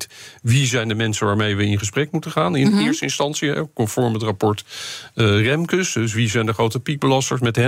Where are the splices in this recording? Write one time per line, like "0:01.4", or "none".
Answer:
none